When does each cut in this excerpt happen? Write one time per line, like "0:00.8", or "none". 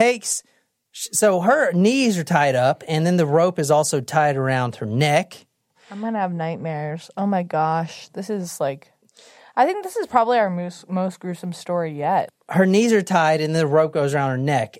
none